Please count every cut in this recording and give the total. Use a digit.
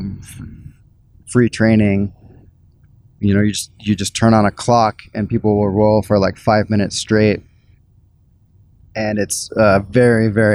0